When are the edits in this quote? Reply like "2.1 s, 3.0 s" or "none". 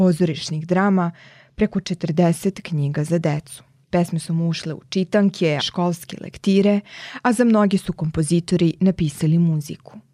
3.8 s, 5.6 s